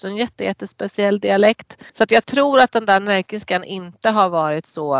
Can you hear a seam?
yes; 1 cut; at 1.9 s

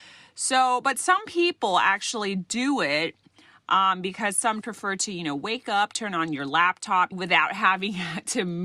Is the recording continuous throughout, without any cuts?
no; 2 cuts; at 4.6 s, 7.1 s

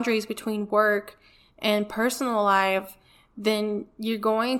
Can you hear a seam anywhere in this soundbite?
no; 0 cuts

